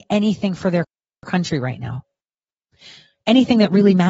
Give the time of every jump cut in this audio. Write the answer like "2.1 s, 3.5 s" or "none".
none